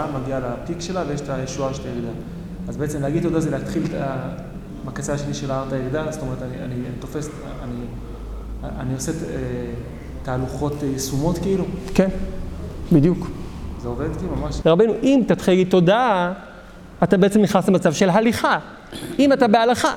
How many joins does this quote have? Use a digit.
1